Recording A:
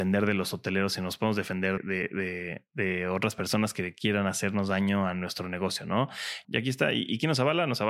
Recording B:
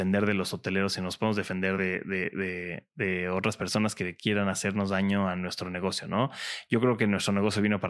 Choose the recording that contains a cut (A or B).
A